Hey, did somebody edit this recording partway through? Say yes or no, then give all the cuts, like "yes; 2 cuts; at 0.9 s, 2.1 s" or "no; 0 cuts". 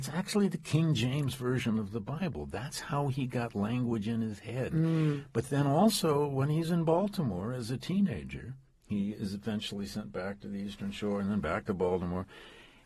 no; 0 cuts